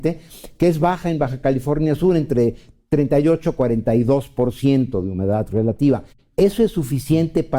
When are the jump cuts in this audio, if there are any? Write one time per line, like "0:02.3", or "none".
none